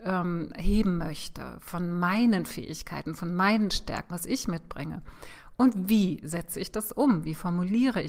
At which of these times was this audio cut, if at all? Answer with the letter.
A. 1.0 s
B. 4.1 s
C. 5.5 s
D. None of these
B